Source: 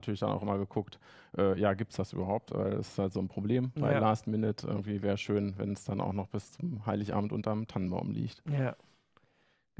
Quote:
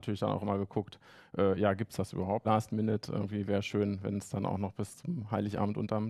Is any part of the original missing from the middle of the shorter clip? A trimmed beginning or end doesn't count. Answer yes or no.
yes